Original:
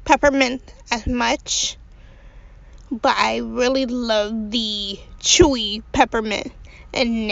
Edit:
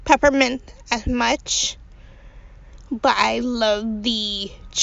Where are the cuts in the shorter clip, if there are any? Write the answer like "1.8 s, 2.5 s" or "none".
3.4 s

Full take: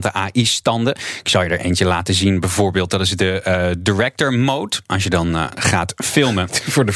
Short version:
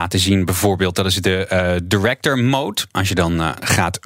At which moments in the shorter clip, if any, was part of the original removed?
none

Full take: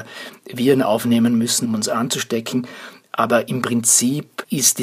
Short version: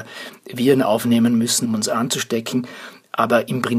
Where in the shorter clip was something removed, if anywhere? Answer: none

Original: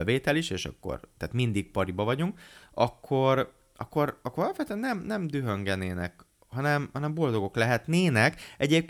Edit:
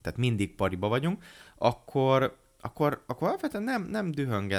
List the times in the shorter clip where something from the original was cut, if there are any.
none

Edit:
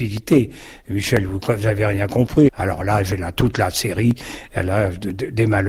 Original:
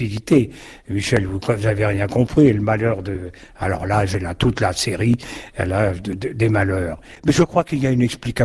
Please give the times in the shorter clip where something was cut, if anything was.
2.5 s

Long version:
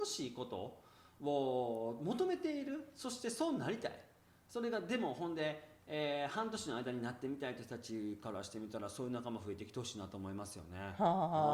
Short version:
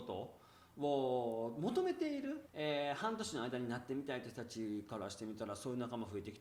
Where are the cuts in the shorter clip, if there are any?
2.5 s

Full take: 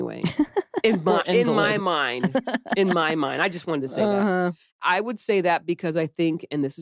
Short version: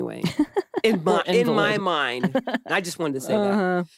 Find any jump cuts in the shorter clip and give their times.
2.7 s

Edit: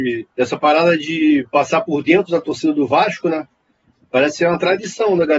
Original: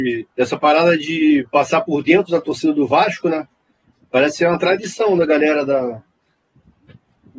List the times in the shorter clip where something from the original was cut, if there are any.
none

